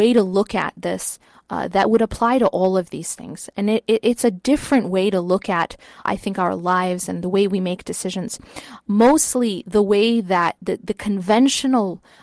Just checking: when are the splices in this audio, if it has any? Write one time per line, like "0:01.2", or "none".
0:06.0
0:10.8